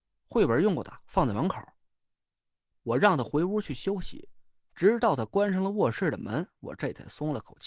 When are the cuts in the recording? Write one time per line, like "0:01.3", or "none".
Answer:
0:02.7